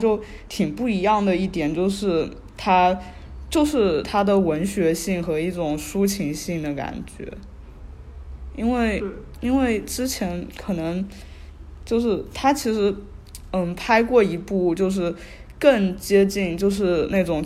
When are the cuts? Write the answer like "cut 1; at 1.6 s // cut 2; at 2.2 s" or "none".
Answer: none